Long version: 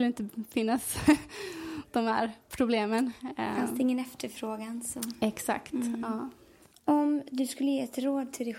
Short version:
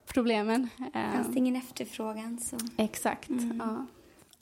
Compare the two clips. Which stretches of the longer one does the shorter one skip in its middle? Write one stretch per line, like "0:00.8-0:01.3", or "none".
none